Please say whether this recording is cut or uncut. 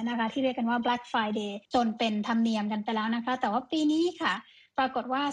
cut